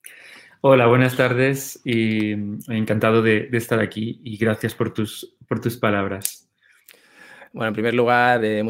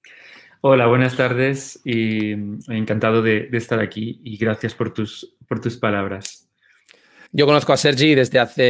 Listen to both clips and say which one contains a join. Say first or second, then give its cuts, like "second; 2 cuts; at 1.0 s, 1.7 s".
second; 1 cut; at 7.3 s